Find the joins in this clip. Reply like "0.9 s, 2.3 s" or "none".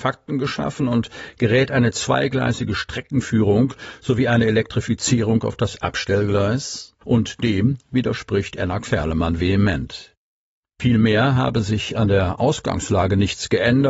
7.0 s